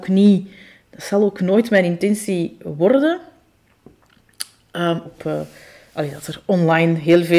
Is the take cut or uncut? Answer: cut